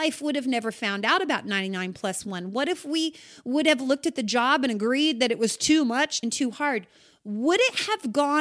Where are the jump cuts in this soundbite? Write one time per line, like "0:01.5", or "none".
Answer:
0:06.2